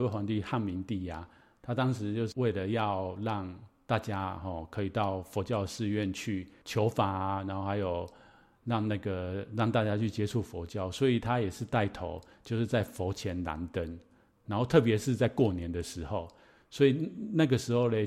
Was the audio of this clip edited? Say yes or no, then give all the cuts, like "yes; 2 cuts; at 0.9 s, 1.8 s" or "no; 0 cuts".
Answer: no; 0 cuts